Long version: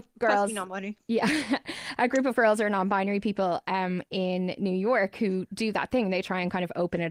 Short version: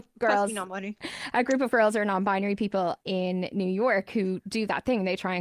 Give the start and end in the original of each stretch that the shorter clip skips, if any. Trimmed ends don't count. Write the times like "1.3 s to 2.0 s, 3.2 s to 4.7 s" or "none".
1.0 s to 1.6 s, 3.6 s to 4.1 s